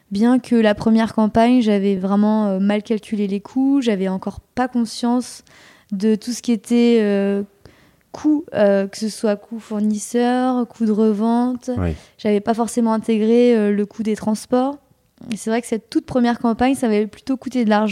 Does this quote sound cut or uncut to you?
uncut